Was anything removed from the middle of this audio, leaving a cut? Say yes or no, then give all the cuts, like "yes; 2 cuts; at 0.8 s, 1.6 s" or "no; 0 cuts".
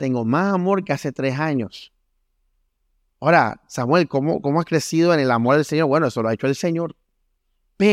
no; 0 cuts